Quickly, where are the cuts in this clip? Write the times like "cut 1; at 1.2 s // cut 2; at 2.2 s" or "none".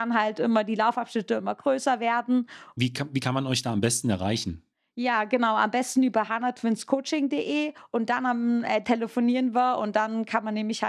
cut 1; at 2.8 s // cut 2; at 8.8 s